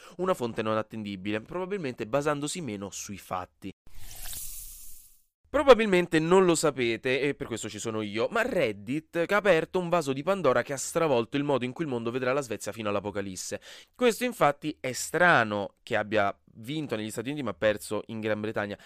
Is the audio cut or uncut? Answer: cut